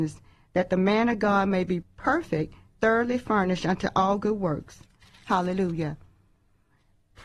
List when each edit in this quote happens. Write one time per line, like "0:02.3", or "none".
0:01.8